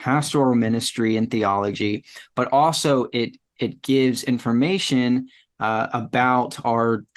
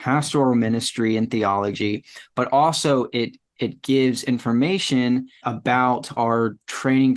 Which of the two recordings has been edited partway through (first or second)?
second